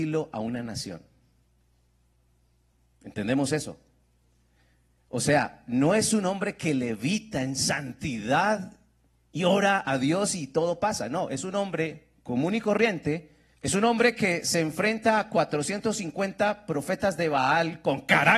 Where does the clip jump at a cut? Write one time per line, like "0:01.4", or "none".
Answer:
0:13.5